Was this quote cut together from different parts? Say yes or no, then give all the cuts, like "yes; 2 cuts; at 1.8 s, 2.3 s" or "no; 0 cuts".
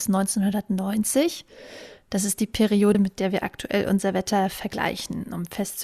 no; 0 cuts